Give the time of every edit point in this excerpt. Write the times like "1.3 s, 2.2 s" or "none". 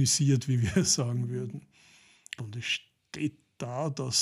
2.4 s